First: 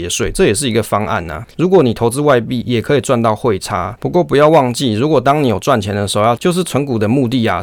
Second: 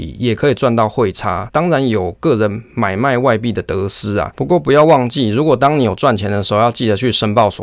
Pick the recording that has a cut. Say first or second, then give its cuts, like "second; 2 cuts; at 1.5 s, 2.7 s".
first; 3 cuts; at 2.6 s, 4.0 s, 6.4 s